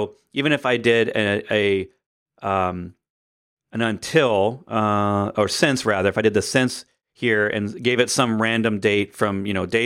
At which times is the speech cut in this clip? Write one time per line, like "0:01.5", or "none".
none